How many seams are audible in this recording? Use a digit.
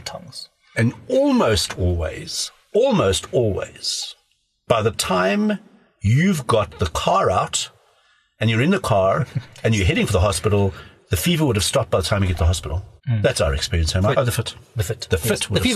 2